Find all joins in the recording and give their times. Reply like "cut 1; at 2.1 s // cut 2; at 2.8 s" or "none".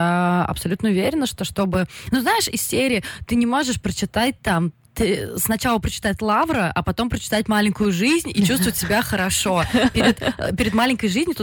none